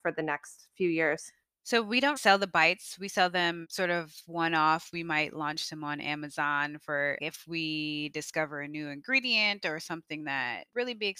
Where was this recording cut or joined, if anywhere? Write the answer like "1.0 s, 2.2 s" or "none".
2.2 s, 7.2 s